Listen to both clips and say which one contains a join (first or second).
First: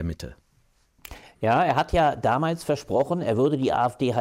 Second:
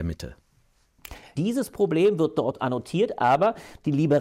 second